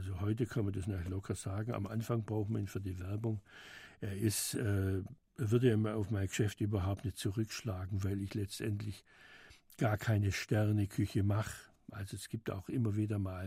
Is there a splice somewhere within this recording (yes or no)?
no